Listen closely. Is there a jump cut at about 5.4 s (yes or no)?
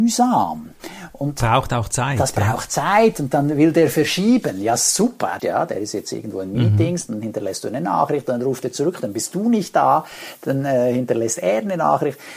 yes